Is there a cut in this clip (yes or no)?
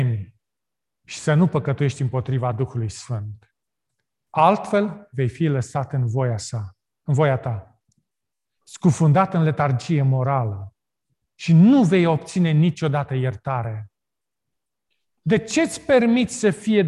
no